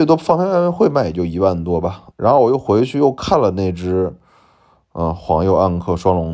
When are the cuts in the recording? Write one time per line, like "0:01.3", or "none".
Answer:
0:02.1